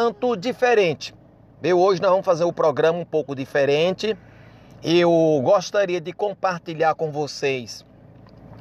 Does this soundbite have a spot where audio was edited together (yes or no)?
no